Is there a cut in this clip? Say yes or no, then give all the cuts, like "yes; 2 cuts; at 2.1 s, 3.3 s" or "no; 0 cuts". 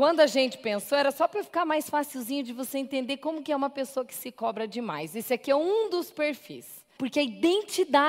yes; 1 cut; at 7.0 s